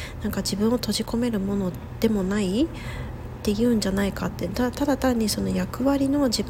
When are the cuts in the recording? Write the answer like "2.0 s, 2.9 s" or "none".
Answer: none